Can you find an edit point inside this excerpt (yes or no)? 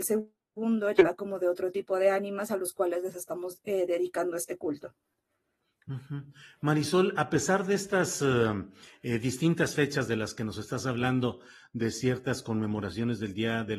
no